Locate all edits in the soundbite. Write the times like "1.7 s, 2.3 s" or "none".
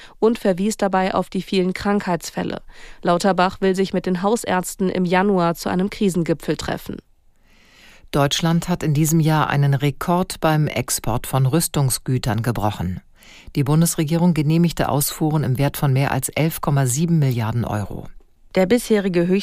18.4 s

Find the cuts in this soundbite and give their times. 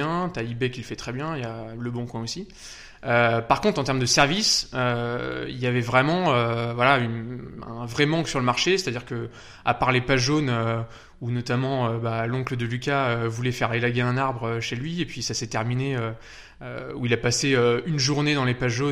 none

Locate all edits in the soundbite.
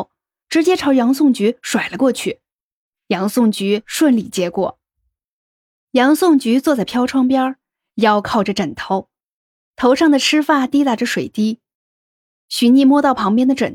11.8 s

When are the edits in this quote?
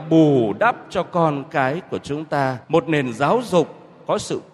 2.6 s

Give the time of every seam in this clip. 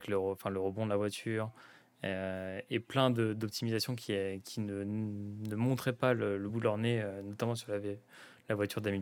none

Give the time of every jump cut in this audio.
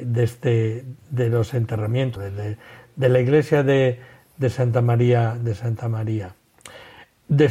2.2 s

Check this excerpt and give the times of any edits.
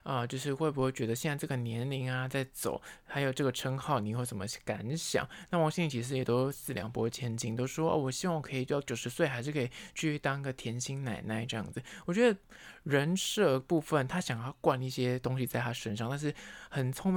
none

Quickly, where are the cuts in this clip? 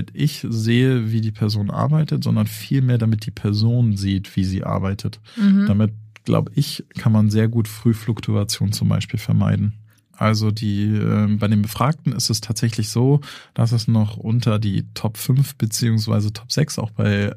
10.1 s

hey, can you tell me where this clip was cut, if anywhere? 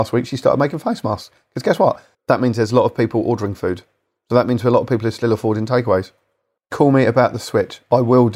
2.1 s, 6.6 s

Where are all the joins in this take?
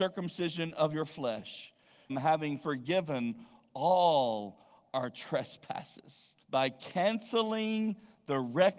2.1 s, 6.4 s

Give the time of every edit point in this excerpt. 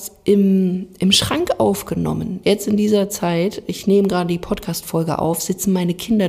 2.4 s

